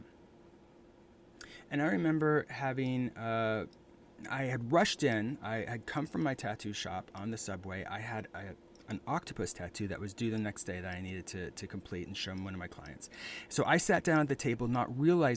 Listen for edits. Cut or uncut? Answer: uncut